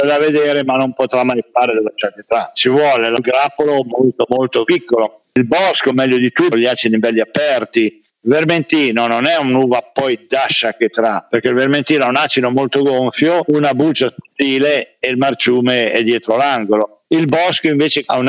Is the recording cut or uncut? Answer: cut